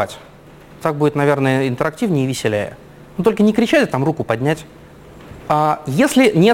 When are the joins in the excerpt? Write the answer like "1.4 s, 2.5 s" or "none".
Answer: 5.4 s